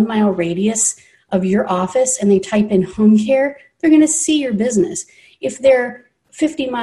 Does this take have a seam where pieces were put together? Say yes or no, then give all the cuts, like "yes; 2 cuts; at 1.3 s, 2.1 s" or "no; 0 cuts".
no; 0 cuts